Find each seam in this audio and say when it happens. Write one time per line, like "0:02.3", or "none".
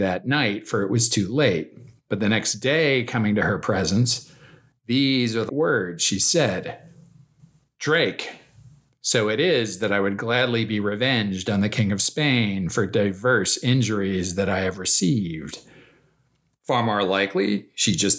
0:05.5
0:16.5